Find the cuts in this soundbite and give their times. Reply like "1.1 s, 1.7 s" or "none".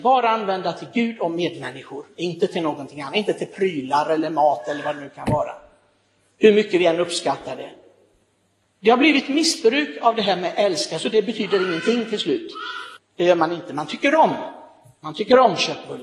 13.0 s